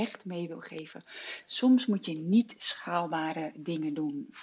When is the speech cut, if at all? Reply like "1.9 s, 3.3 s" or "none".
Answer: none